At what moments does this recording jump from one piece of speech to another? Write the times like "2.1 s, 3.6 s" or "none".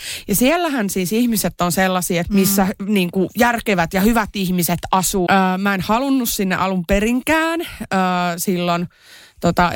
2.2 s, 5.3 s